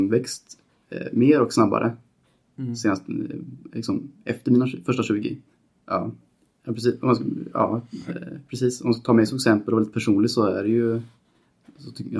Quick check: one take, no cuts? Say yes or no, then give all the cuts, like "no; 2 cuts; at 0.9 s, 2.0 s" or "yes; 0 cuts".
no; 1 cut; at 5.8 s